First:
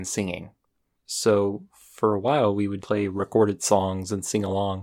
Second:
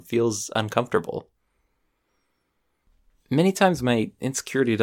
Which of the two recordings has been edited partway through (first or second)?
first